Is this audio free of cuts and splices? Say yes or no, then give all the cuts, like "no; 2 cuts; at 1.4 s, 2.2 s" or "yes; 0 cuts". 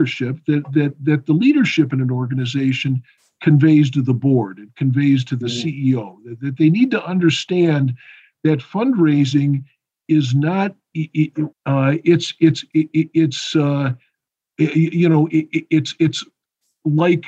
no; 1 cut; at 11.5 s